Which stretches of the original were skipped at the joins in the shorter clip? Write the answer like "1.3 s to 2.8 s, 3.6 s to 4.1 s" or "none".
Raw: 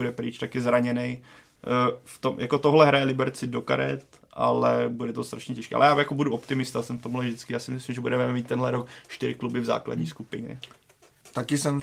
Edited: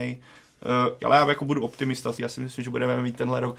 2.0 s to 5.7 s, 6.8 s to 7.5 s